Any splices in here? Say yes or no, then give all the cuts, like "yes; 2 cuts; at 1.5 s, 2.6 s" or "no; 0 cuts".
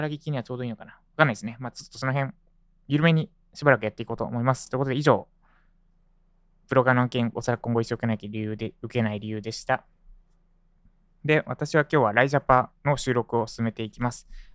no; 0 cuts